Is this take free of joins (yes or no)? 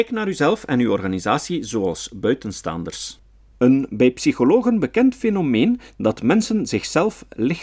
no